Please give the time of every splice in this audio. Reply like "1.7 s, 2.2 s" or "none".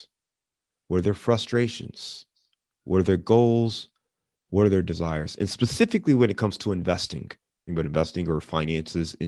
7.7 s